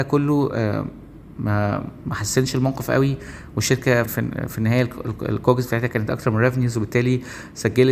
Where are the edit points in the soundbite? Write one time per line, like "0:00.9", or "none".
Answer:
0:04.0